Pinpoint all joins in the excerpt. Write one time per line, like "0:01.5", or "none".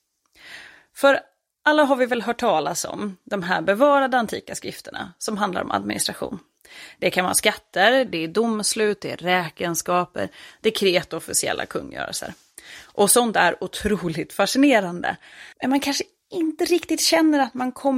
0:08.1
0:15.5